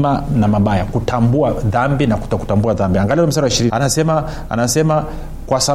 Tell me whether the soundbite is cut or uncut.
cut